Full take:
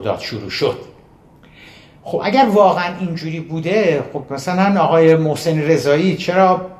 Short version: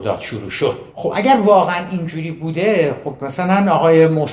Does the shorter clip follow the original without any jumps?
no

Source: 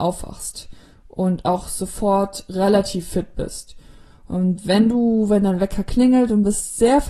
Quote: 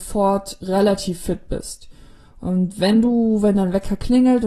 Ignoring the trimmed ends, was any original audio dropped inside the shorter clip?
no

